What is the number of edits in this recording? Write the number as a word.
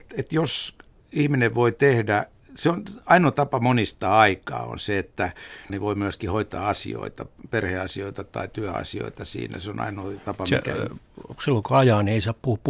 one